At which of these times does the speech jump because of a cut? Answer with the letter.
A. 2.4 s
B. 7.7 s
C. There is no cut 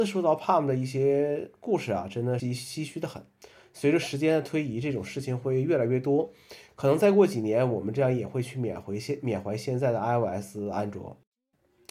A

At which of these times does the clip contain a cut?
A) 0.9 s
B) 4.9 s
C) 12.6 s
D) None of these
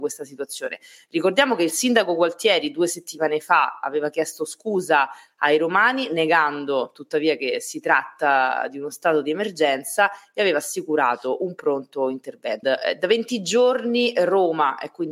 C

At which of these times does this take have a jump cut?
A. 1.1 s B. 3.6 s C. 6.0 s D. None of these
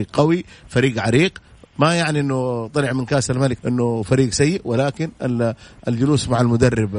B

